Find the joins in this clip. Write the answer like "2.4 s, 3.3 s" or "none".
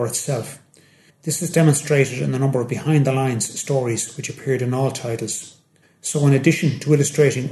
1.1 s, 5.8 s